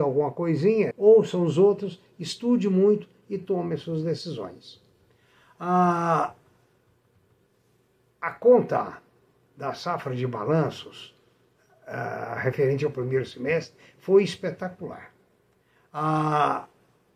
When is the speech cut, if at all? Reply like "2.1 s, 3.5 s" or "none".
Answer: 0.9 s